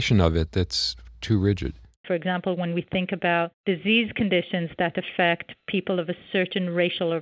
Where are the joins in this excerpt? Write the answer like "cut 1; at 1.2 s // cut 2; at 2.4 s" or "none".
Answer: cut 1; at 2.0 s